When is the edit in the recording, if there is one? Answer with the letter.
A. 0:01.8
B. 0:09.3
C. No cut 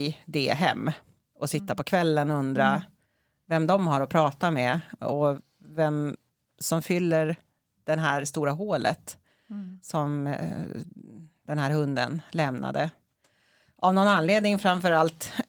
C